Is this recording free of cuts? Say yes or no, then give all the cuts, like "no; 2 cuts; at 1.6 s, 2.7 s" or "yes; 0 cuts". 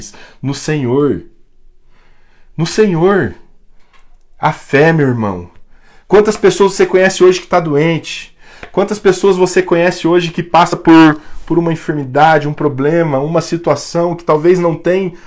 yes; 0 cuts